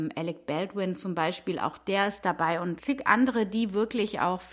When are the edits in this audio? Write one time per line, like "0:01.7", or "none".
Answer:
0:02.8